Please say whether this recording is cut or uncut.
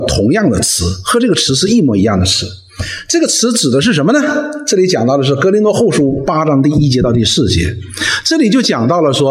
uncut